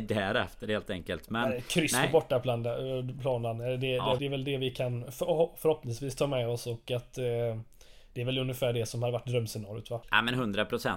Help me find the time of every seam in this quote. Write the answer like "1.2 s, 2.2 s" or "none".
4.2 s, 10.0 s